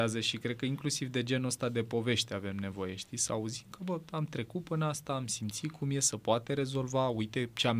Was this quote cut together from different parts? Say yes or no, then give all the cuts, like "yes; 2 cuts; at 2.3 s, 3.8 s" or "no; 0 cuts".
no; 0 cuts